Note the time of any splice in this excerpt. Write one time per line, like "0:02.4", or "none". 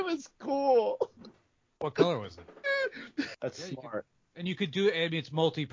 0:03.3